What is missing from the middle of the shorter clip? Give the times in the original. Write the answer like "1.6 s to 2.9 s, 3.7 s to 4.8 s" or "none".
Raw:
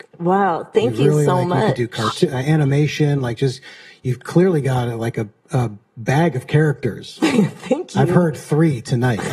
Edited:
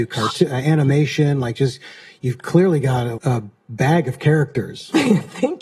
5.0 s to 5.4 s